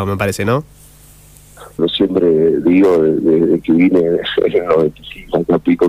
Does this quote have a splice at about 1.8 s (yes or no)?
yes